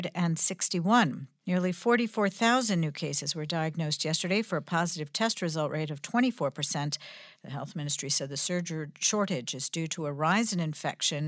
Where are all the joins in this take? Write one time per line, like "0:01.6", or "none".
0:01.4
0:07.4